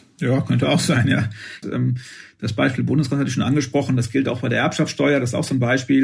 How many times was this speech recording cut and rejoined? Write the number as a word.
one